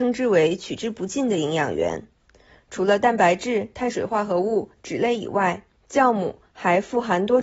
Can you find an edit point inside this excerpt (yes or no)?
no